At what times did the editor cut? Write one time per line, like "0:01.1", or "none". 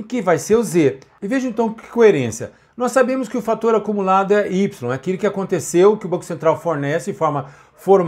none

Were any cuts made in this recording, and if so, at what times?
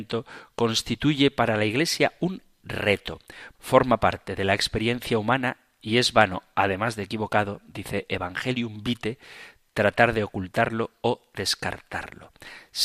0:03.5

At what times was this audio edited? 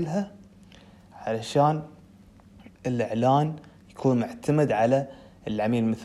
0:02.7

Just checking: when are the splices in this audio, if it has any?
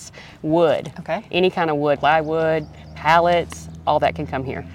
0:02.0

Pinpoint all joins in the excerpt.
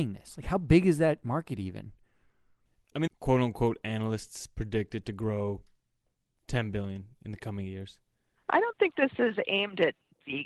0:03.1

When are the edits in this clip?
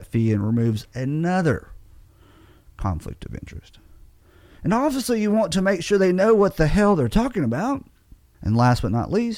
0:08.3

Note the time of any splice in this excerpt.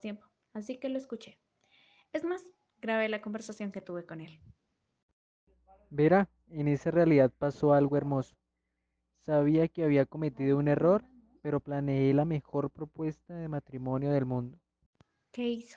none

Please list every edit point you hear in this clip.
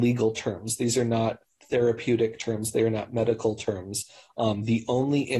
none

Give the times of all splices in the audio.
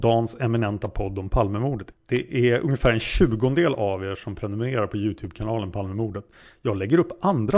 0:01.9

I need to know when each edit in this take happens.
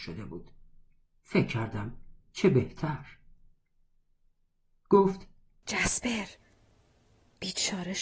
none

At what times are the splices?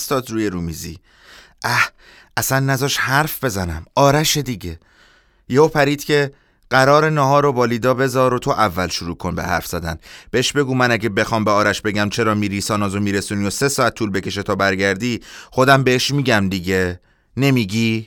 none

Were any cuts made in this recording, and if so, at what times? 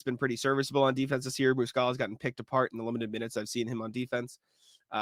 none

